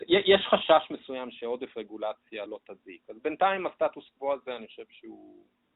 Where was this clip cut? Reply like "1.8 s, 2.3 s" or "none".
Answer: 2.5 s